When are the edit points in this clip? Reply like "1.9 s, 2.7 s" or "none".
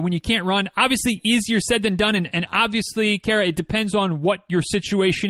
none